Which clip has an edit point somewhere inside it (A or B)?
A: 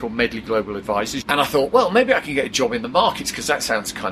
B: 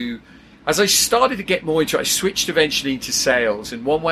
A